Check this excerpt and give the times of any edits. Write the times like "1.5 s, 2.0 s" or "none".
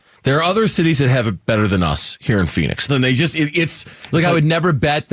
2.9 s